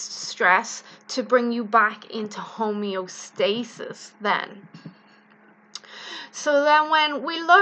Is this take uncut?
yes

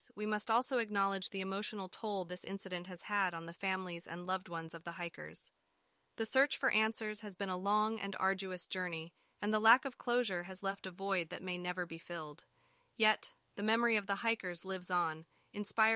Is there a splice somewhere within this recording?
no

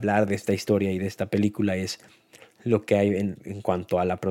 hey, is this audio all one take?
no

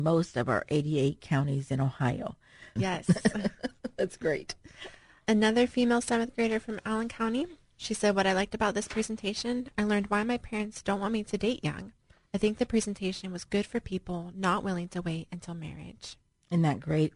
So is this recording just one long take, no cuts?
no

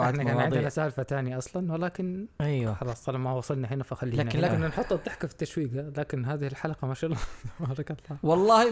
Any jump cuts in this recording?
yes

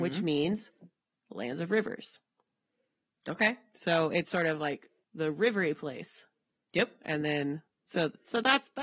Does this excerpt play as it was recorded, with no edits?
yes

